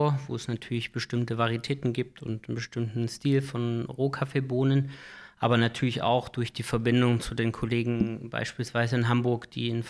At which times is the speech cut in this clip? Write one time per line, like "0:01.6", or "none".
none